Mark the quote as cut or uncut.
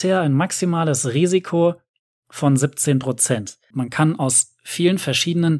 cut